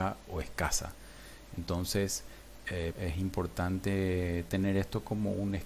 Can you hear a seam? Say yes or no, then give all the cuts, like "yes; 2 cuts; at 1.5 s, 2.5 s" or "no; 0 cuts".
yes; 1 cut; at 2.9 s